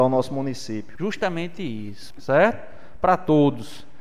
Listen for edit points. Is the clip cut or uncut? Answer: cut